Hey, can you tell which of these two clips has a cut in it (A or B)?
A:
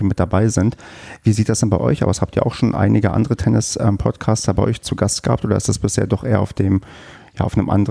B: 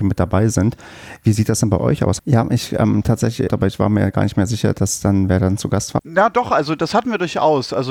B